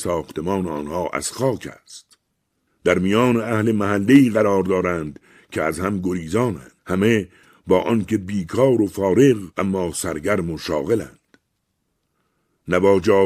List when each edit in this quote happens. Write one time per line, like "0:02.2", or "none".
0:02.7
0:06.8
0:09.5